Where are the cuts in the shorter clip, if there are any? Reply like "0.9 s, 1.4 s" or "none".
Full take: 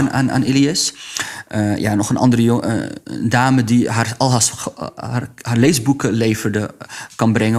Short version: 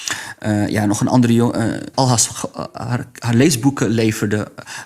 1.9 s